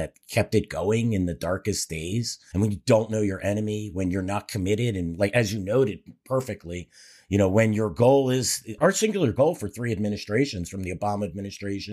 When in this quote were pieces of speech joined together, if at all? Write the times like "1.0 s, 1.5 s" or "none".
2.5 s, 8.8 s

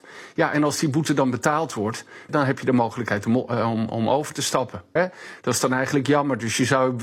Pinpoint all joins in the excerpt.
2.3 s, 5.0 s

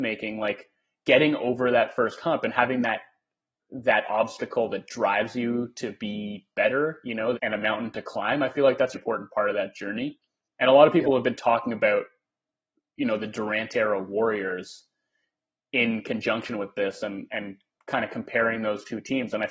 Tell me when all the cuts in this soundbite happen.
7.3 s, 8.9 s

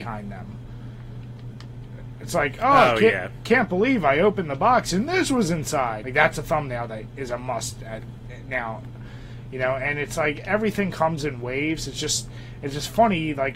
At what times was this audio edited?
6.0 s

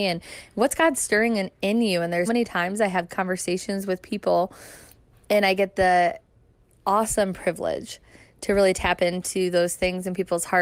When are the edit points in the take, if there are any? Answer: 2.3 s

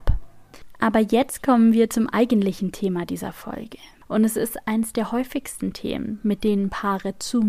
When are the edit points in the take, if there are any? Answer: none

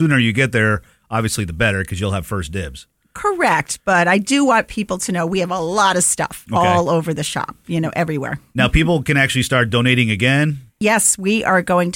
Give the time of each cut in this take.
none

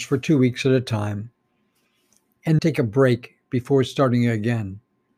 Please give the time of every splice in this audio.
2.6 s

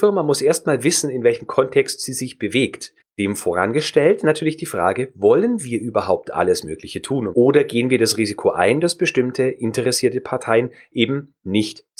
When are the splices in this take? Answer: 3.0 s, 7.3 s

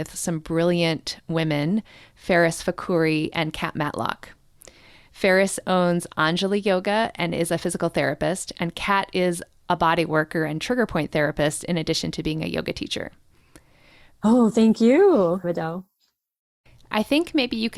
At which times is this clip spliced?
14.2 s, 15.4 s

